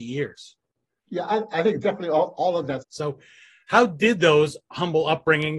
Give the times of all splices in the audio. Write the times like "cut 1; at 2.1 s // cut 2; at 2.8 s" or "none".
cut 1; at 2.8 s